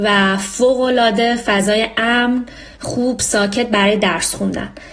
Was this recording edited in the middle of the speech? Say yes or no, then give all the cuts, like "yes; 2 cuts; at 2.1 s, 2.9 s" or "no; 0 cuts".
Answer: yes; 1 cut; at 2.7 s